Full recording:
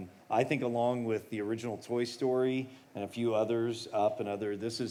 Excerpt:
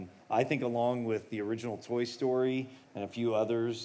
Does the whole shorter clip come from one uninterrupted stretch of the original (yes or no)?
yes